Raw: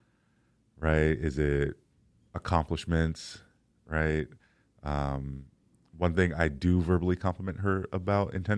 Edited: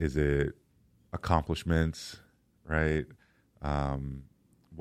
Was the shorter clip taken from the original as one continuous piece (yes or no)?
yes